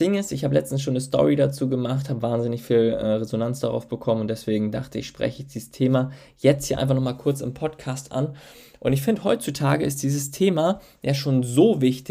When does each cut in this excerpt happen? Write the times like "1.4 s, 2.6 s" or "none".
none